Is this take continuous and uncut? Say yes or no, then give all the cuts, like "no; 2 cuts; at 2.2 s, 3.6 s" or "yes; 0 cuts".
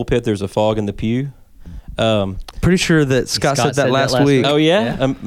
yes; 0 cuts